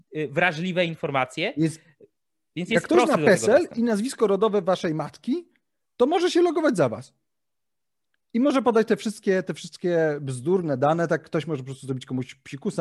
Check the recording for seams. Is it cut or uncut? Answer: uncut